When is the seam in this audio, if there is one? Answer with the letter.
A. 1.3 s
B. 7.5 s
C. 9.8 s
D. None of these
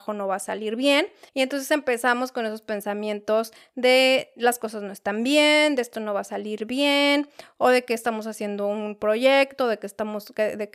A